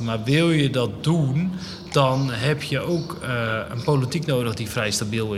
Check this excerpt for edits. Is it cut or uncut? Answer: uncut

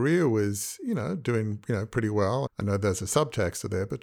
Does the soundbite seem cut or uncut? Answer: cut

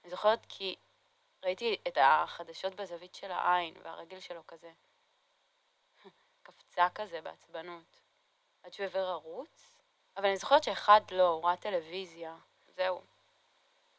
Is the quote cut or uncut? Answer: cut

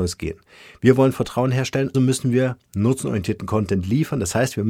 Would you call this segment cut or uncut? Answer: cut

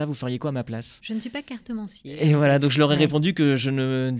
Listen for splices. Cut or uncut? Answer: uncut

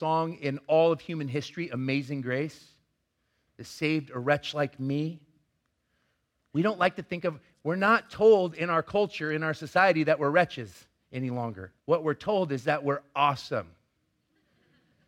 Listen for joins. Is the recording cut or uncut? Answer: cut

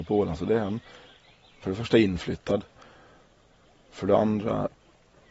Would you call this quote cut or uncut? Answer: uncut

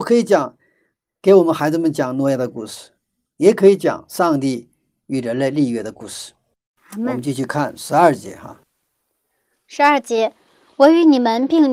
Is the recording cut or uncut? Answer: uncut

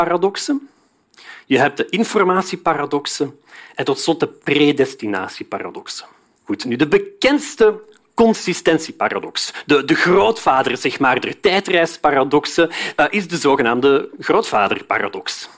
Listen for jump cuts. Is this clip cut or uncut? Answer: cut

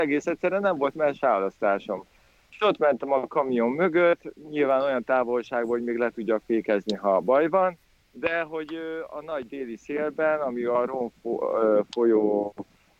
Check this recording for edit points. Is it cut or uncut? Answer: uncut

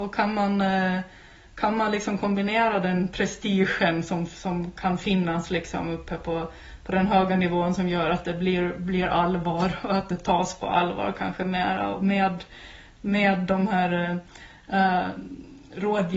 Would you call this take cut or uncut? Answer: uncut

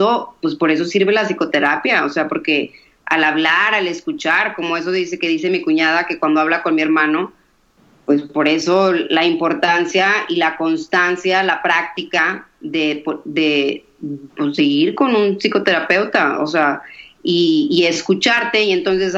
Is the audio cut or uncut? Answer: uncut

